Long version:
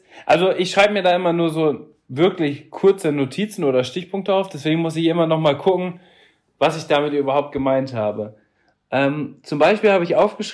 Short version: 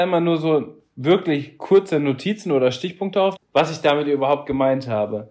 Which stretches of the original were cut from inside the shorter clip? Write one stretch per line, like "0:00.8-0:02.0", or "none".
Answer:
0:04.5-0:06.4